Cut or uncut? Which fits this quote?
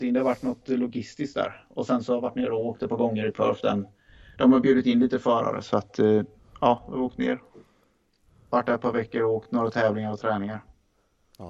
uncut